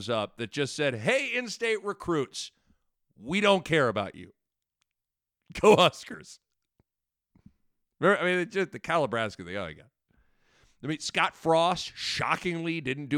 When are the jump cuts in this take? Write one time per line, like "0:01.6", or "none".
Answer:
none

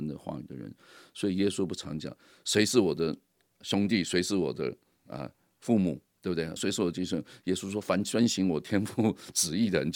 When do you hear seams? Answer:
0:06.6

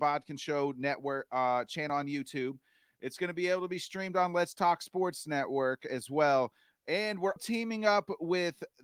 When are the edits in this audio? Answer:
0:07.4

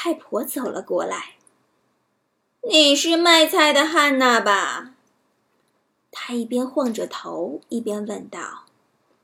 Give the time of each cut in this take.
0:01.8

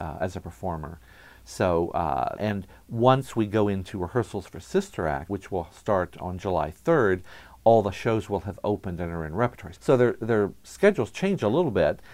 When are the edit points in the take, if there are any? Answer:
0:02.3
0:05.3
0:09.7

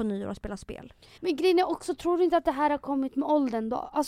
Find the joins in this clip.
0:01.2

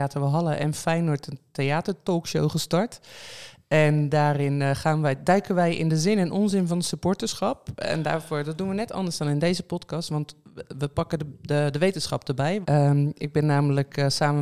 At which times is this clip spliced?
0:12.6

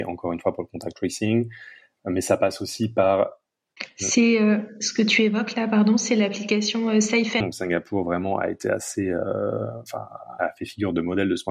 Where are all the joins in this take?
0:07.4
0:10.4

